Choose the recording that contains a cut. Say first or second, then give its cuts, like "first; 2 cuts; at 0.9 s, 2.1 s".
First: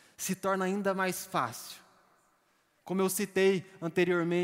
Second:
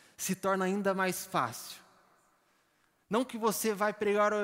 first; 1 cut; at 2.8 s